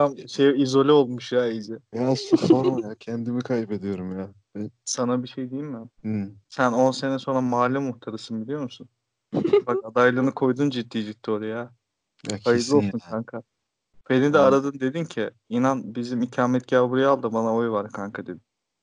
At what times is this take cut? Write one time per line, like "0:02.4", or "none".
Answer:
0:06.0